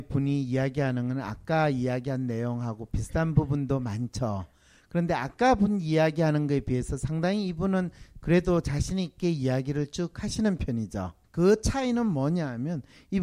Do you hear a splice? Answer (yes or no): yes